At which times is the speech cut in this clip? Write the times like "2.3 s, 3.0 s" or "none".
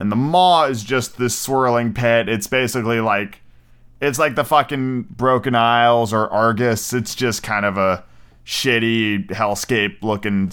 none